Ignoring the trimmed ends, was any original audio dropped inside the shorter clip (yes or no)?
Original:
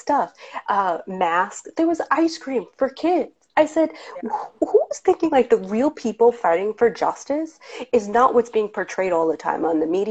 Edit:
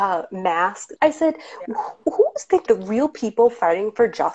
yes